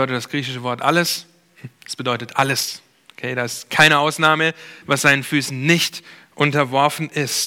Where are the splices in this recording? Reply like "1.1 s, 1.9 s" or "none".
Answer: 4.8 s